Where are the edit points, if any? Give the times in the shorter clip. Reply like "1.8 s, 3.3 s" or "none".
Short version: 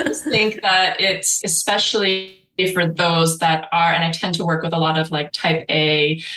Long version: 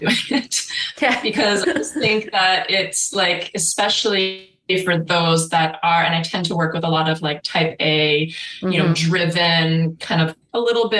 1.4 s